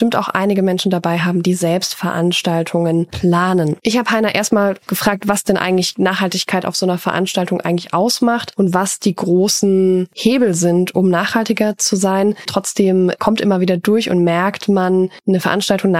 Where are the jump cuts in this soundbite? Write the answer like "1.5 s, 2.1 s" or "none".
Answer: 12.5 s

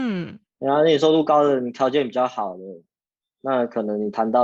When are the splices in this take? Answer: none

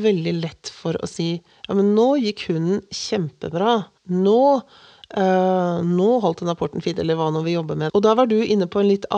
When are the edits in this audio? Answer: 4.0 s, 7.9 s

